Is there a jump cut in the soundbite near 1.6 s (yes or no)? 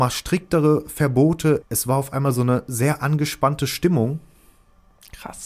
yes